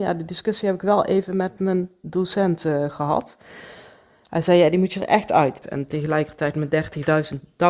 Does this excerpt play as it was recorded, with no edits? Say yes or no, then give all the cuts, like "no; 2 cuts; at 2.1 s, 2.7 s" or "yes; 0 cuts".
no; 1 cut; at 5.6 s